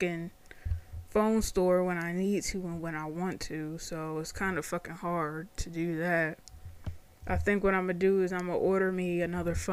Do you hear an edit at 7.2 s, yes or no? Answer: yes